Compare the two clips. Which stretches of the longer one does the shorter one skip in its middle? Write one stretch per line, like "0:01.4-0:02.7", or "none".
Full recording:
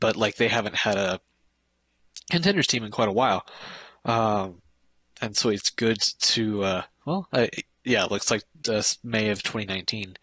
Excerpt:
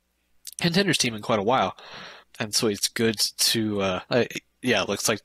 0:03.9-0:05.0
0:06.9-0:07.3